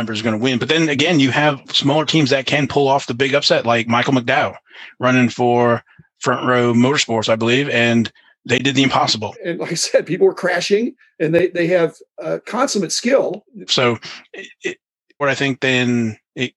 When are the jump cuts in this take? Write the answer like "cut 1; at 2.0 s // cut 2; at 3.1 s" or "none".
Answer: cut 1; at 9.3 s // cut 2; at 13.7 s // cut 3; at 15.2 s